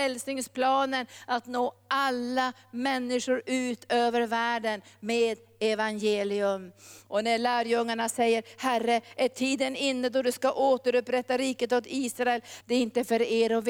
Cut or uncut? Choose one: cut